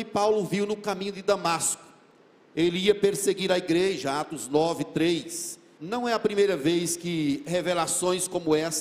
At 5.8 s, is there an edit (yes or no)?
yes